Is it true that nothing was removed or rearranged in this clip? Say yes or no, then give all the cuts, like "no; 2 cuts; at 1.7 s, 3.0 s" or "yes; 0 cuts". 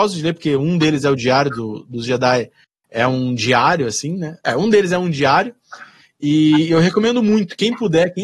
no; 1 cut; at 4.4 s